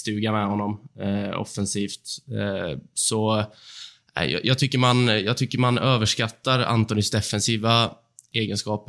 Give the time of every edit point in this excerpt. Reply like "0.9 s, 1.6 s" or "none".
none